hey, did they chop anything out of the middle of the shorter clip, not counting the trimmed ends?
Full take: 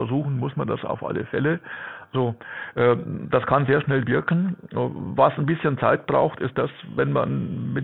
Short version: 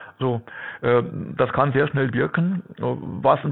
no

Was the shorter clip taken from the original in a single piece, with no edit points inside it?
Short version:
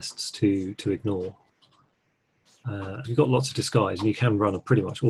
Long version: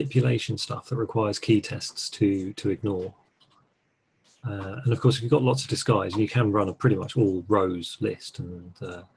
no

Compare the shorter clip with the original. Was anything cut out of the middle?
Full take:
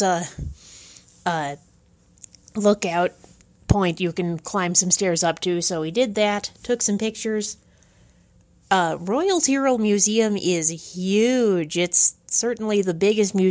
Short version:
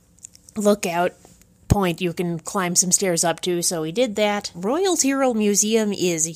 yes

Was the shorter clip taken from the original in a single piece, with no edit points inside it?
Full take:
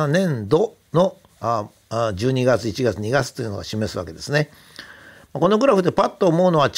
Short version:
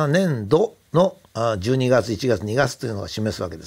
no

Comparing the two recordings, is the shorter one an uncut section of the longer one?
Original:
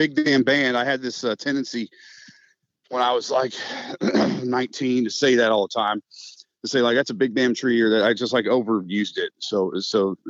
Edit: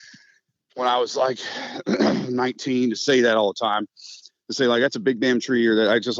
yes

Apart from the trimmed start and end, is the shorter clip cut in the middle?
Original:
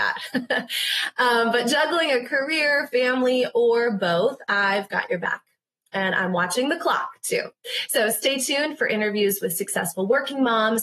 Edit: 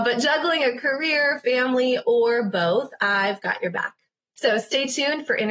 yes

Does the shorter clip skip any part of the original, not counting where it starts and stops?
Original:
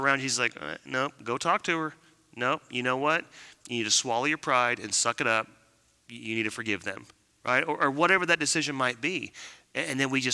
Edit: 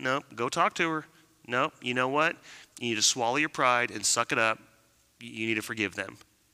no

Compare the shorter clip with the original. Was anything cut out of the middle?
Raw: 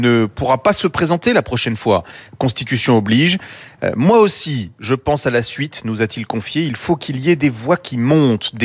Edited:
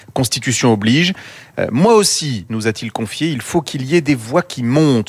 yes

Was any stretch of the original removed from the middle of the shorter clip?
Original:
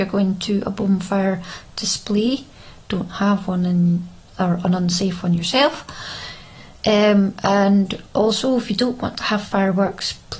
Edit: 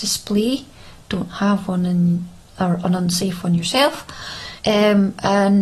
yes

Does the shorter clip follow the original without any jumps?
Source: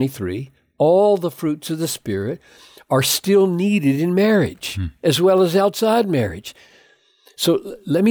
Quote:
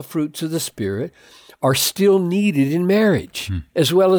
yes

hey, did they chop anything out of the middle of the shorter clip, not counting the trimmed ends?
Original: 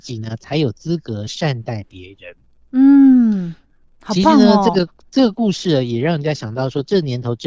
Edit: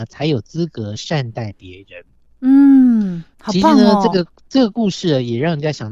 yes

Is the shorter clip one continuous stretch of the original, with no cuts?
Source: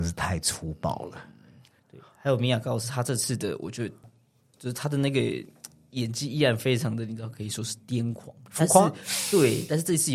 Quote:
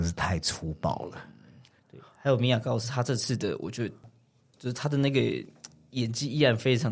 yes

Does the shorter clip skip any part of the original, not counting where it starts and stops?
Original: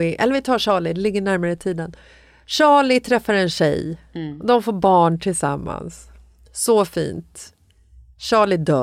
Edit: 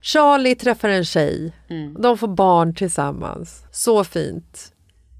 yes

